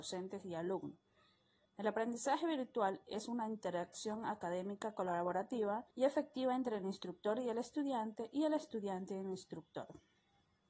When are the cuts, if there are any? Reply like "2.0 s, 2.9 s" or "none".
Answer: 1.7 s, 5.9 s

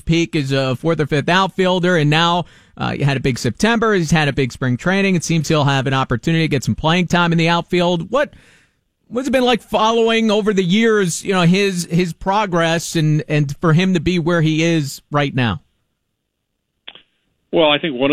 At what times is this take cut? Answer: none

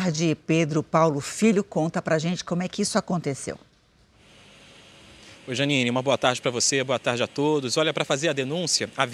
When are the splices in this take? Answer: none

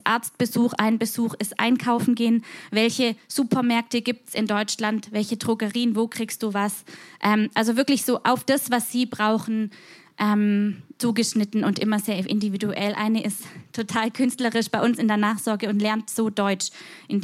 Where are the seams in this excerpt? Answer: none

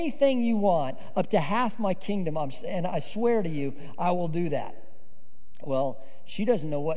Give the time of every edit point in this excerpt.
none

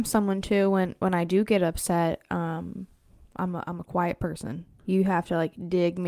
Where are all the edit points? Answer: 4.8 s

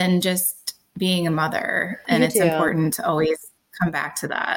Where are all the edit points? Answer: 2.0 s

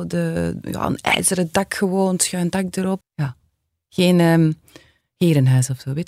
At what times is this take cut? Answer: 3.0 s

